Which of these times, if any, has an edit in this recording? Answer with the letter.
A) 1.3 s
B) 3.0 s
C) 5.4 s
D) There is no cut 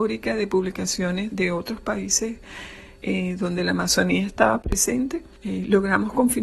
A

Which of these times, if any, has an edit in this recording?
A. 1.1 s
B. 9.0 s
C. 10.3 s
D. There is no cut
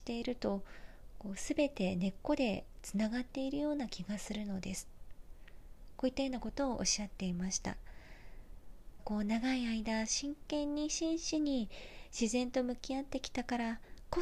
B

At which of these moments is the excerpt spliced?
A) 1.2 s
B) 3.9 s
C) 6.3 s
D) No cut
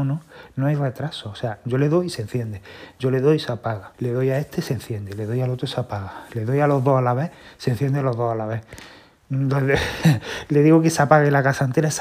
B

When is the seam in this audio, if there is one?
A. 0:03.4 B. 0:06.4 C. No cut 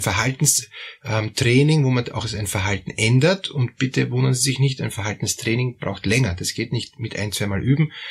C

